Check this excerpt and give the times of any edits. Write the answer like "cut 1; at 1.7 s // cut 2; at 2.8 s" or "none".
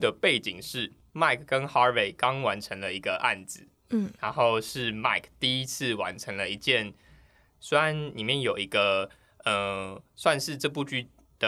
cut 1; at 7.6 s

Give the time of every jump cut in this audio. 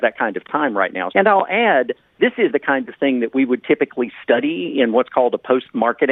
cut 1; at 1.1 s // cut 2; at 2.5 s

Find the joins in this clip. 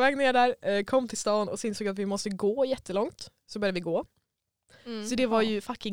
cut 1; at 4.7 s

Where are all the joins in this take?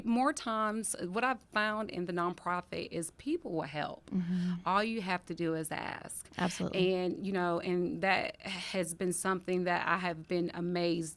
none

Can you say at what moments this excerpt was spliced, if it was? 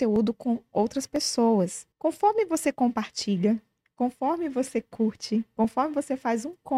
cut 1; at 1.9 s

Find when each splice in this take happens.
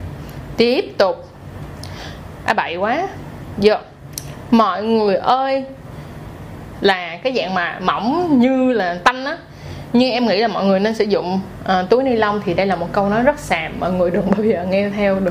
cut 1; at 6.8 s

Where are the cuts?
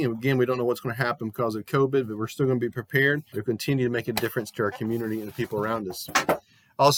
cut 1; at 3.3 s

